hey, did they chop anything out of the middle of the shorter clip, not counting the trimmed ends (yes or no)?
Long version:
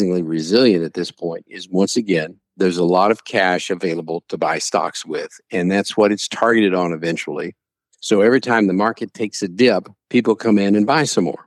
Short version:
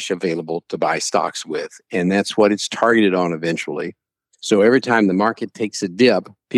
no